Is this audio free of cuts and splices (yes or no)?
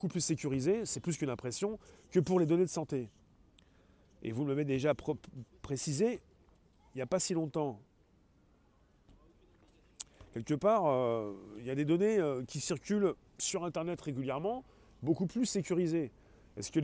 yes